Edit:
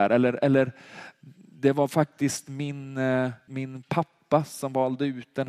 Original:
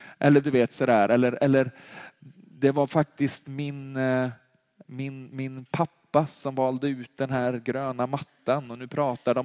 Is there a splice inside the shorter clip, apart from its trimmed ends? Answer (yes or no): yes